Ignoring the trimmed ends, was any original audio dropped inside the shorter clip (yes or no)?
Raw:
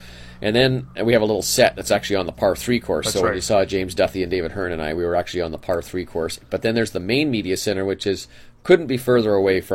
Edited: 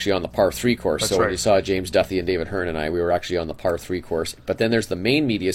no